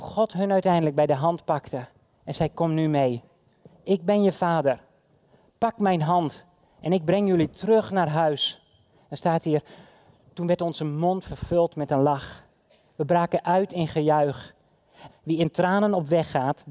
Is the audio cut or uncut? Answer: cut